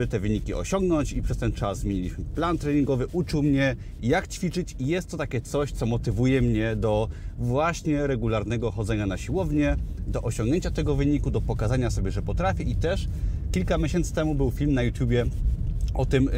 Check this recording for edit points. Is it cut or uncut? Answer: uncut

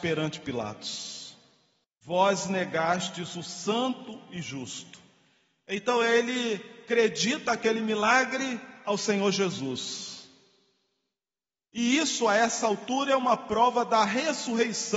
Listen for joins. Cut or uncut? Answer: cut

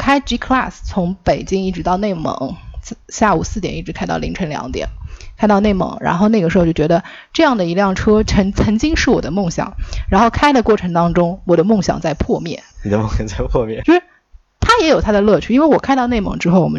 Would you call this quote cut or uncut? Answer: cut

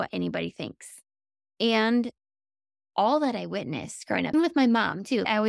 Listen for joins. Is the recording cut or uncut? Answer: cut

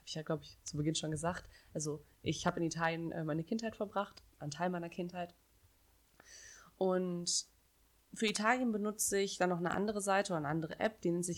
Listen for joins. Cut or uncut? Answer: uncut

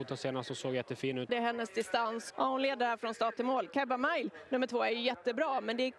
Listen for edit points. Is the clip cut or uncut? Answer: cut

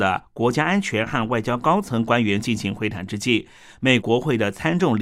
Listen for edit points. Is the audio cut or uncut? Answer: cut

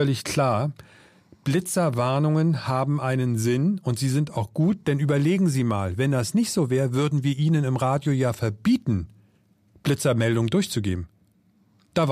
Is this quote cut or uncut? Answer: uncut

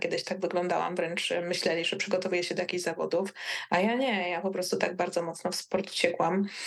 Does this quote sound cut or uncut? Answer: uncut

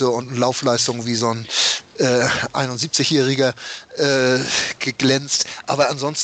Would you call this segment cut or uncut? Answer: uncut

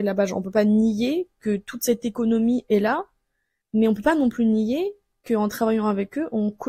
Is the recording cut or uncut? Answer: uncut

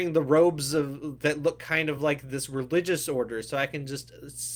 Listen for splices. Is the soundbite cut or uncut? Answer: uncut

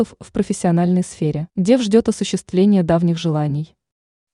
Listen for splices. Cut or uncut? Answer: cut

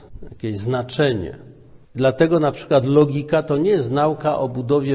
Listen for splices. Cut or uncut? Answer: cut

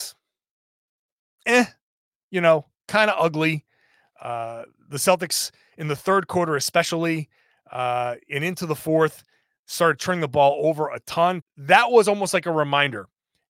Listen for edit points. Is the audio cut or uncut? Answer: cut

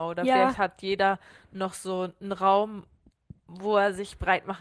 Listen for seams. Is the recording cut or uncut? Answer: uncut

